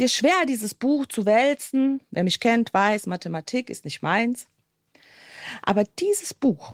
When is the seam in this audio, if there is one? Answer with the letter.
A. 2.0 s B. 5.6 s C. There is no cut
A